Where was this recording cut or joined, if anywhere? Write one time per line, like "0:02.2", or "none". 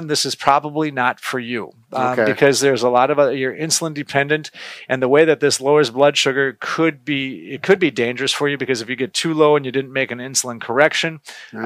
none